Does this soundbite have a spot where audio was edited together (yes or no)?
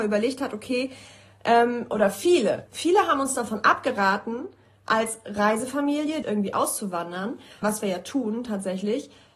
yes